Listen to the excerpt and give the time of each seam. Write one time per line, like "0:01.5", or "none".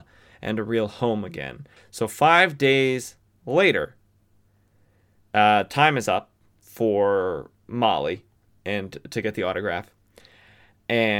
0:01.8